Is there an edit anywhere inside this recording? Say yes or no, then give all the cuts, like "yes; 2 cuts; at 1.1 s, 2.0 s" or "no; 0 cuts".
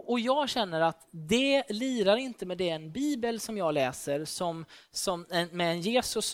no; 0 cuts